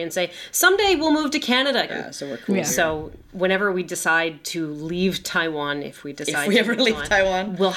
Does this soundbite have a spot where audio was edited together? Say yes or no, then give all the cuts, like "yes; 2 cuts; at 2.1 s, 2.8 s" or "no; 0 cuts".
yes; 1 cut; at 1.9 s